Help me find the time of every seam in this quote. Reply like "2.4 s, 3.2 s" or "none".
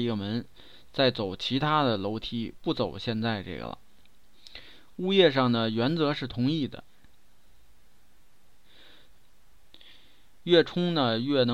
9.1 s